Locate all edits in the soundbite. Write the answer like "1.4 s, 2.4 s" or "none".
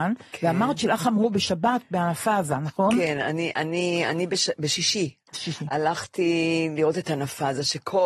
none